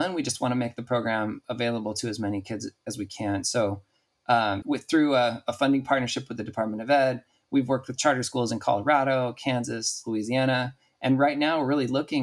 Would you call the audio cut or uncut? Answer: cut